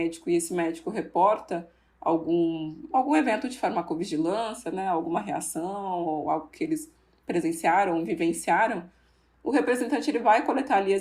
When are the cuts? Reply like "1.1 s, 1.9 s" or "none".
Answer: none